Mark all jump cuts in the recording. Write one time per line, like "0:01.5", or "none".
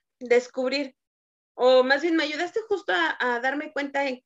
none